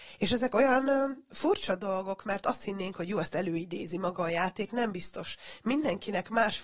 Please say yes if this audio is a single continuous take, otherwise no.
yes